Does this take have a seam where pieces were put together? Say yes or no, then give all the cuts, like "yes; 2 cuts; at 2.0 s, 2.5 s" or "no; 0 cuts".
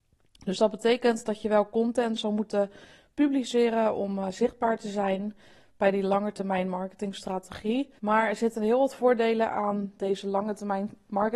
yes; 1 cut; at 8.0 s